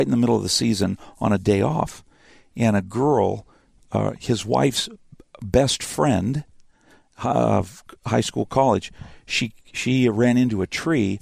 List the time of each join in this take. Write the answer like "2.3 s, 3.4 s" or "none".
none